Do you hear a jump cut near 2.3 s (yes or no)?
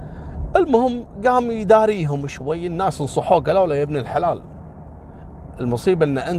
yes